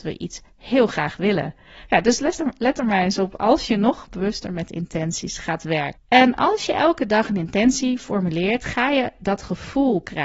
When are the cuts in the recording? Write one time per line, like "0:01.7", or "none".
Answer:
0:06.0